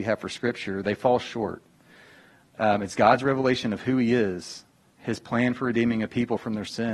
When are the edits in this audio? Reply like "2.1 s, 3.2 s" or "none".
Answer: 2.5 s